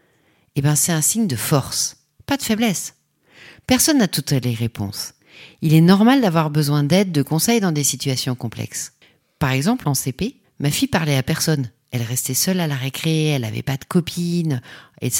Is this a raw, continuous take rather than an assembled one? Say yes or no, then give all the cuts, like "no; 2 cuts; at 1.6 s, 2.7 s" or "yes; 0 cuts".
yes; 0 cuts